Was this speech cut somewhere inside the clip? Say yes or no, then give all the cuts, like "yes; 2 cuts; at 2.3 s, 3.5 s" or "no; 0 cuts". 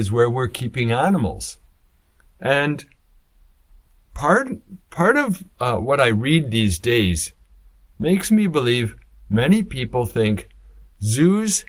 no; 0 cuts